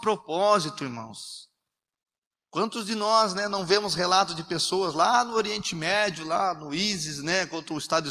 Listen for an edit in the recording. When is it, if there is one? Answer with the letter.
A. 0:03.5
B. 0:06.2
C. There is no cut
C